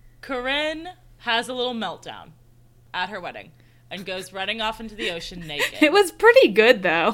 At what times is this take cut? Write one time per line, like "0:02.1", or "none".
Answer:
none